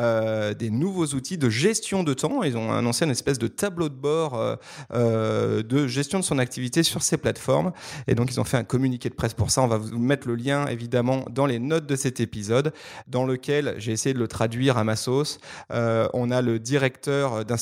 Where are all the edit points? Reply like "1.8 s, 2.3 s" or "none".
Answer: none